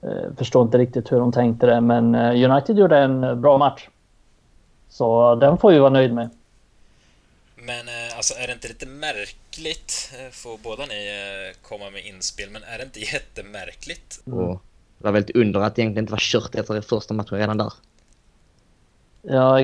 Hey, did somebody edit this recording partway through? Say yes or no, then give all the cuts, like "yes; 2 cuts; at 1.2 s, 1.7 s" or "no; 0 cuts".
yes; 2 cuts; at 4.8 s, 14.2 s